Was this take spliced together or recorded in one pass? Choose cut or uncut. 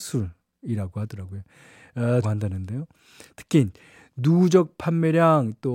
cut